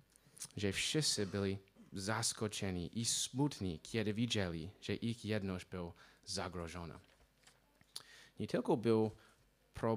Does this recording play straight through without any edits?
yes; 0 cuts

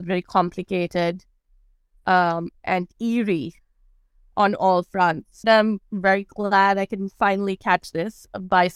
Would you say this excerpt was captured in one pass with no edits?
no; 1 cut; at 5.4 s

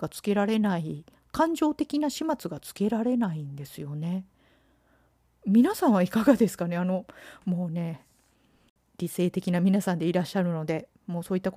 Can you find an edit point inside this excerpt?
no; 0 cuts

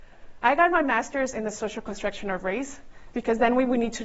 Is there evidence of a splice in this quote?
yes; 1 cut; at 3.1 s

